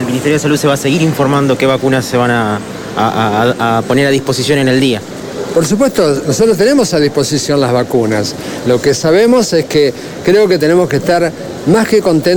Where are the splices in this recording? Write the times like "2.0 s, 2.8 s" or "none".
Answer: none

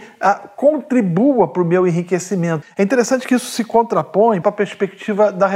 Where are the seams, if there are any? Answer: 2.6 s, 4.4 s

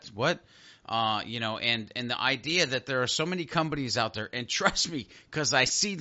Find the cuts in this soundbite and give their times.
none

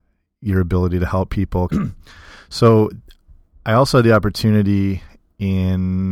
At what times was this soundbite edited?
1.7 s

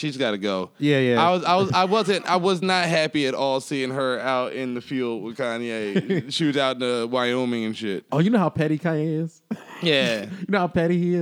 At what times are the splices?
none

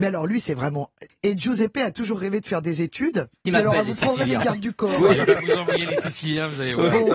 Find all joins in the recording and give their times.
1.1 s, 3.5 s

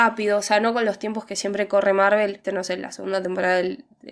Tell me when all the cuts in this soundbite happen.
2.4 s

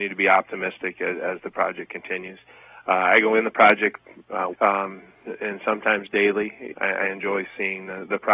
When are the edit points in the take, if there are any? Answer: 4.5 s, 6.7 s

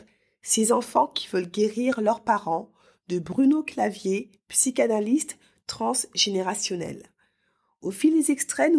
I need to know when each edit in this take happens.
none

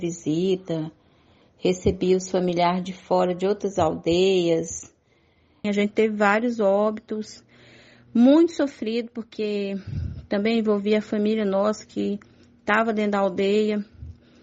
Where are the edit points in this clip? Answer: 5.6 s

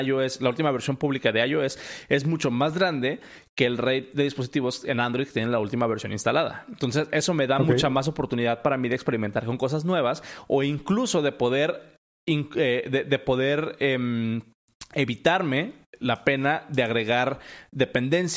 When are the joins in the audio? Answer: none

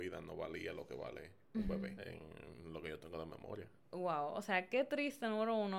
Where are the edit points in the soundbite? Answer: 2.0 s, 3.8 s

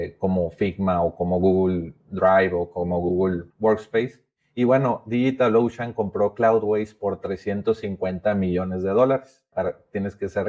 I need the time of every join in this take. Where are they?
3.5 s, 9.5 s

